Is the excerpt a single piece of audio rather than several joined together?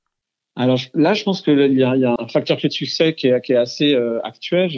no; 1 cut; at 2.2 s

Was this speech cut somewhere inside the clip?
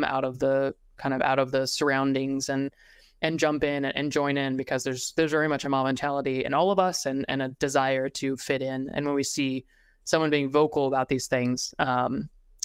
no; 0 cuts

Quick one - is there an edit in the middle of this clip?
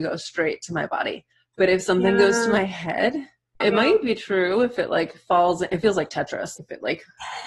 yes; 2 cuts; at 3.6 s, 6.6 s

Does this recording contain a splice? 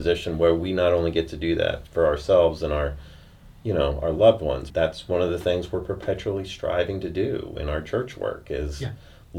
yes; 1 cut; at 4.7 s

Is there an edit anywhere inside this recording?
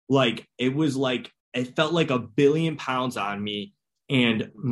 yes; 1 cut; at 1.4 s

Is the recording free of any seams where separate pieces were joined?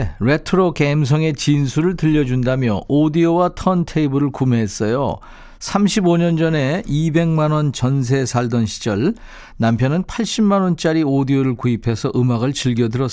yes; 0 cuts

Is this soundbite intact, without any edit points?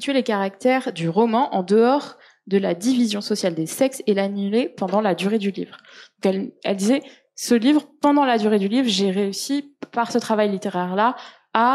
yes; 0 cuts

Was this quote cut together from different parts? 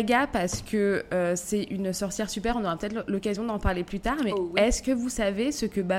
no; 0 cuts

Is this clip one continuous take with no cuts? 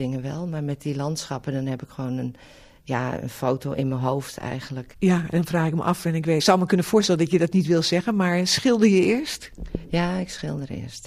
no; 2 cuts; at 4.9 s, 6.4 s

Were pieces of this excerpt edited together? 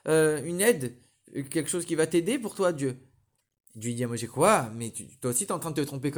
no; 0 cuts

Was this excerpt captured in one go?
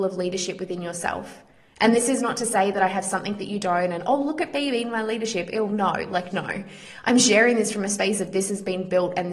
no; 1 cut; at 6.3 s

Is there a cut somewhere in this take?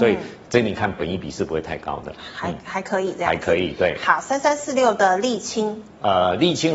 no; 0 cuts

